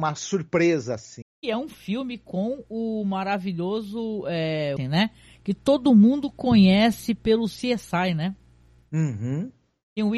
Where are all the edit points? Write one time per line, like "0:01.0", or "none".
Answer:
0:01.2
0:04.8